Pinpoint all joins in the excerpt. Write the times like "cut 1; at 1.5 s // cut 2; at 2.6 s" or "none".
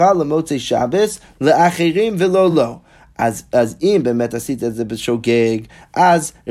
none